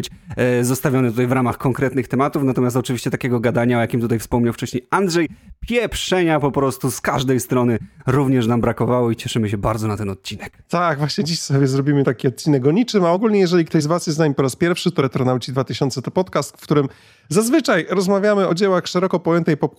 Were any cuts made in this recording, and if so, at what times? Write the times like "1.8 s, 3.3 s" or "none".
none